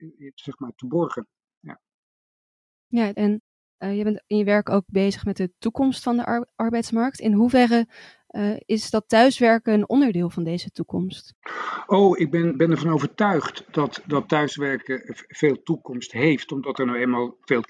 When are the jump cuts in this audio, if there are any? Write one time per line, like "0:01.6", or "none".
0:03.1